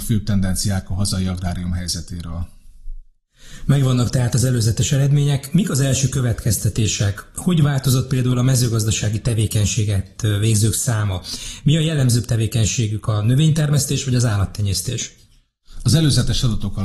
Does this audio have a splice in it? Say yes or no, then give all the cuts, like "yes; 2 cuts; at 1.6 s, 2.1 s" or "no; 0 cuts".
no; 0 cuts